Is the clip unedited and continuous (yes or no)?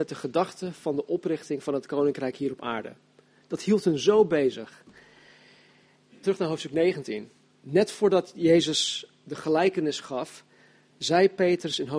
no